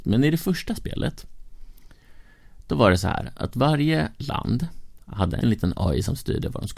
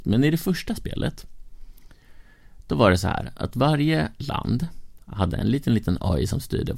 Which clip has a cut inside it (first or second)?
first